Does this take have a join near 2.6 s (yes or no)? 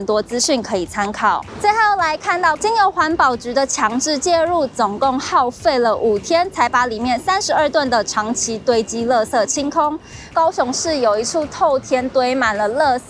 yes